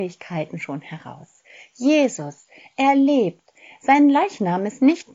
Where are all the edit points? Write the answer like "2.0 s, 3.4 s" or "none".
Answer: none